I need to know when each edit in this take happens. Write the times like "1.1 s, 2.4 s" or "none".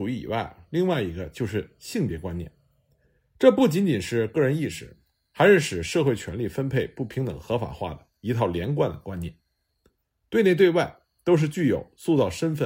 none